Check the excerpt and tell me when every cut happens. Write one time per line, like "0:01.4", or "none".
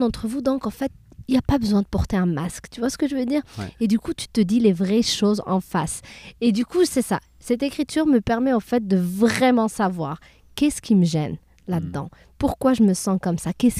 none